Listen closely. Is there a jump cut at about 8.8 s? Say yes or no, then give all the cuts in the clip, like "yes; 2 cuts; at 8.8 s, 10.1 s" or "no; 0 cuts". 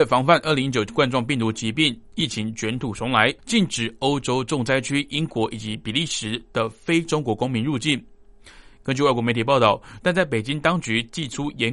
no; 2 cuts; at 3.4 s, 10.0 s